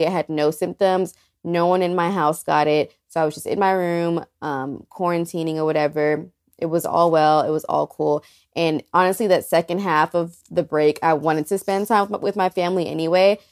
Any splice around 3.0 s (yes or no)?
no